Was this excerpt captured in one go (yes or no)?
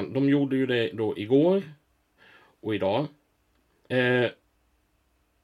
no